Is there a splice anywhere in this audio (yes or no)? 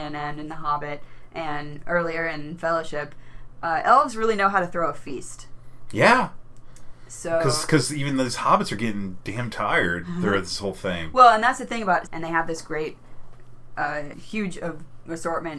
yes